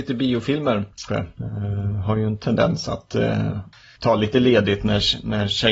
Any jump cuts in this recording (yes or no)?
yes